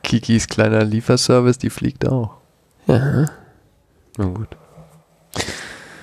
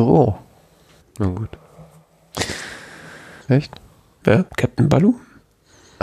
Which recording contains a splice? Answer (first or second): second